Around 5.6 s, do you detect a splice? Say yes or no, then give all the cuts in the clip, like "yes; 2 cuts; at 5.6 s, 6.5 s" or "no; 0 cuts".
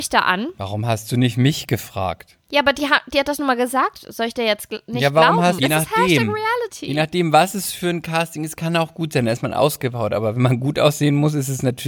yes; 1 cut; at 5.6 s